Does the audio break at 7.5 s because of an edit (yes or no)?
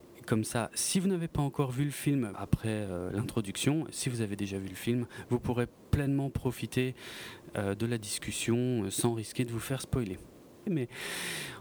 no